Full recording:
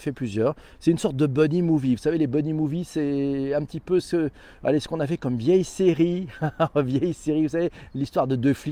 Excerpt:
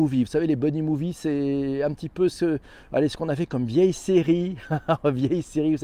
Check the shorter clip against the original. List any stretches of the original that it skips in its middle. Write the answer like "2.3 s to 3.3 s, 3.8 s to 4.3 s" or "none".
none